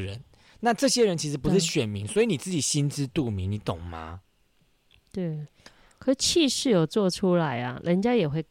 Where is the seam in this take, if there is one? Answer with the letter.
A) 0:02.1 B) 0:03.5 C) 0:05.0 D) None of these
D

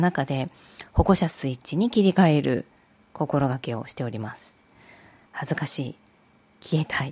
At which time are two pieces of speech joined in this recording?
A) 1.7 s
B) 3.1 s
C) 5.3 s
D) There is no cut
C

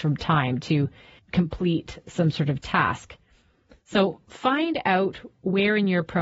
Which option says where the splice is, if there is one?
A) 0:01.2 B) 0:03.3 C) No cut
A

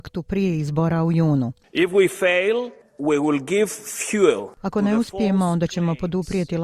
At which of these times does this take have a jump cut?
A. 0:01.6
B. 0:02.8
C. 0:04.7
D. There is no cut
B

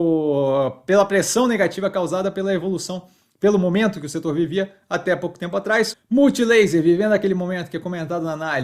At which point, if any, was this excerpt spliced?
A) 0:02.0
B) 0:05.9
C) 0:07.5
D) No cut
B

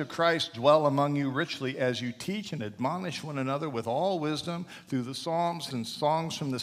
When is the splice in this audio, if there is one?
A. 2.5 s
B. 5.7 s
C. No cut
B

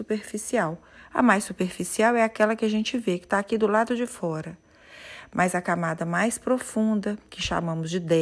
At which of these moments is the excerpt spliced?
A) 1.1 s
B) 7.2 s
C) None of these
C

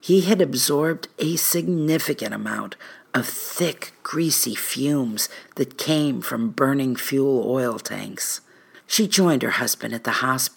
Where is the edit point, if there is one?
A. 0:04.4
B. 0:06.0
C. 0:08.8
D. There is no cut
C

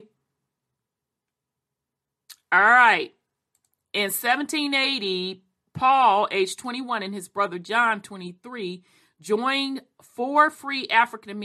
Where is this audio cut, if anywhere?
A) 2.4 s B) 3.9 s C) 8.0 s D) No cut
D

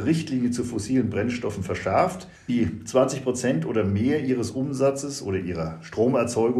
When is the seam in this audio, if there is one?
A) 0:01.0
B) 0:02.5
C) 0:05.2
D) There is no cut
B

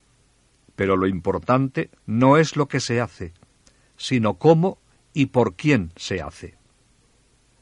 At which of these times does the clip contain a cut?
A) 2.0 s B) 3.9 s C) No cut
A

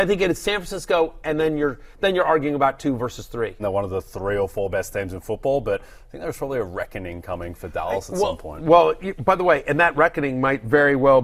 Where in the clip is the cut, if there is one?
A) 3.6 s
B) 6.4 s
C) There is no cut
A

